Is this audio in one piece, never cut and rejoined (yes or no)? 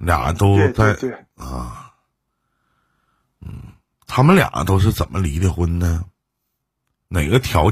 yes